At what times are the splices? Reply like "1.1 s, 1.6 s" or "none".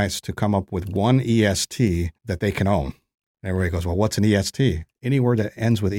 2.2 s